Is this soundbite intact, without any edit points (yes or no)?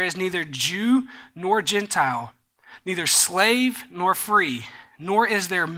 yes